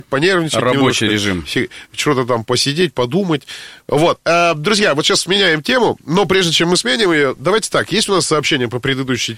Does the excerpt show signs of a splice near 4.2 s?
no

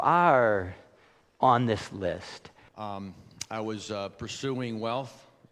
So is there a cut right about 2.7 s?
yes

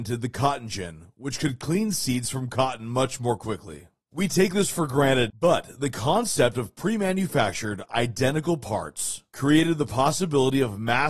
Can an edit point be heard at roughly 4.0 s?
yes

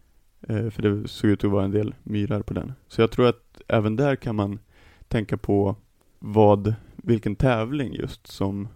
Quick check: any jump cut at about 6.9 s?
no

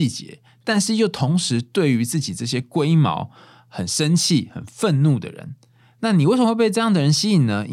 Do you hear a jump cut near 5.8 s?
no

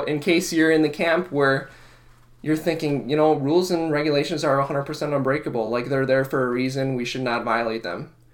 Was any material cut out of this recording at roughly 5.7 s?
no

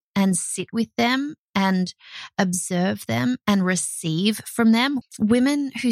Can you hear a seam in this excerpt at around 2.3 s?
no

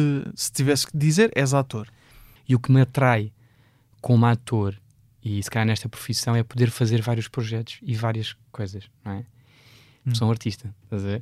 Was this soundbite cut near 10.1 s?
yes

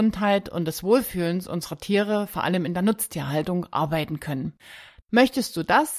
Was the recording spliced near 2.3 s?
no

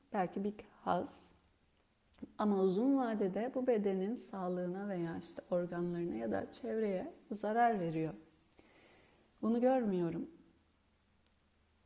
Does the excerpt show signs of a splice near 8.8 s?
no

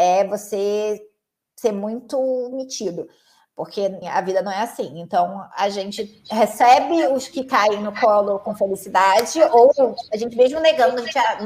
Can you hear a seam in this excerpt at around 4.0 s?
yes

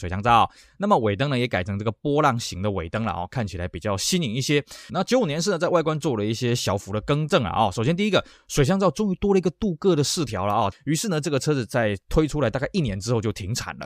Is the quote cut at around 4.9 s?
yes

